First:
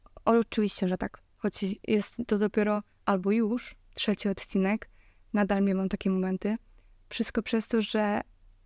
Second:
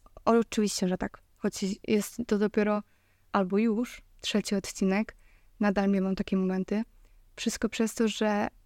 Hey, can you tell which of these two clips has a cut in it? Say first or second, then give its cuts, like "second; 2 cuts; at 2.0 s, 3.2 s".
first; 1 cut; at 2.9 s